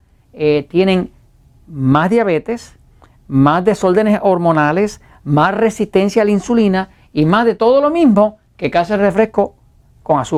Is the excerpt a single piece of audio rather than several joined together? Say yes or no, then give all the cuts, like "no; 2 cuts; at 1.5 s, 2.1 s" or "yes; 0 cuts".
yes; 0 cuts